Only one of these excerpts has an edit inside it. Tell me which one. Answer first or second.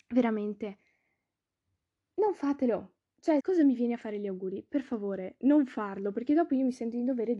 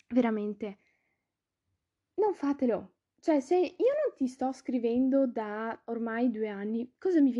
first